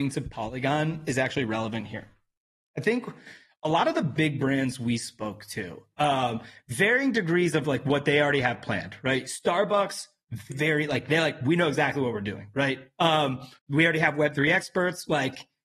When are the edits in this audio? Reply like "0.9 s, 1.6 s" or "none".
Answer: 10.5 s, 13.6 s

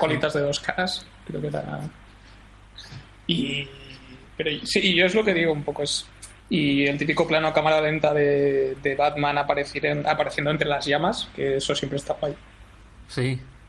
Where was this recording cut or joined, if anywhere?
6.4 s

